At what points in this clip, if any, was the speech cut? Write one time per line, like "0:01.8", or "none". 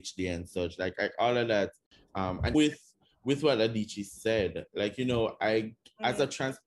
0:02.5